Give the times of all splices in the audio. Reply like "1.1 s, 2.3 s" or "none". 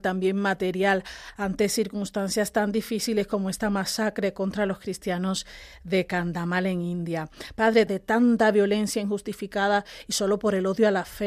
7.9 s